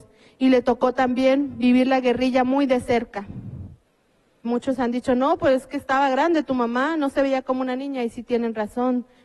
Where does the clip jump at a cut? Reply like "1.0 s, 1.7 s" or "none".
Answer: 4.4 s